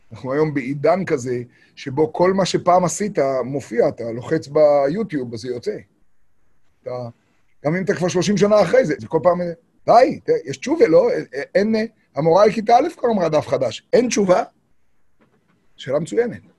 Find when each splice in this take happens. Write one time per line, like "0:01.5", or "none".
0:09.0